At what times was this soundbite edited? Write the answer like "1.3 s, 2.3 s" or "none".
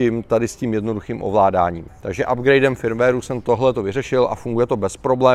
1.9 s